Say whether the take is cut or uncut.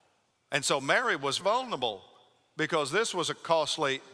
cut